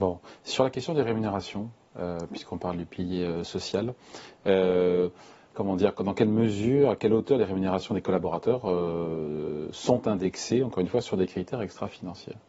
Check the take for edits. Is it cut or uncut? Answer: cut